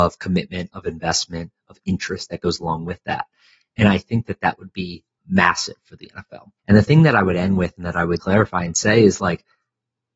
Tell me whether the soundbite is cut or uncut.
cut